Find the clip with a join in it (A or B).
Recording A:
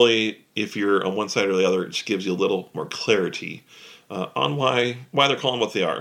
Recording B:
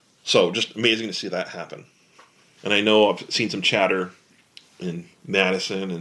B